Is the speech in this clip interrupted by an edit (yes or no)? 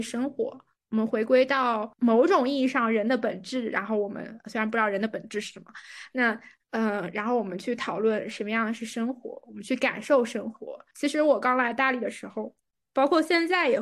yes